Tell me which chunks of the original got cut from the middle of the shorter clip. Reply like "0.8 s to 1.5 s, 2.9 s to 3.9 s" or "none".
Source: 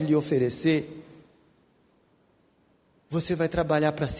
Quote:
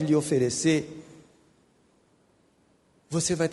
none